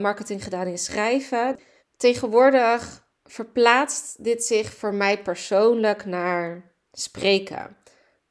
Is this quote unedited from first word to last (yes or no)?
no